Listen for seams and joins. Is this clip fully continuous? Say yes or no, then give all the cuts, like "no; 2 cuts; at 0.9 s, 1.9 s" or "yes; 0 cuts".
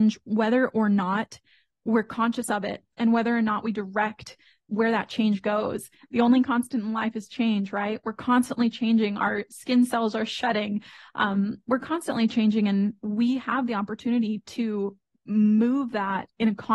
yes; 0 cuts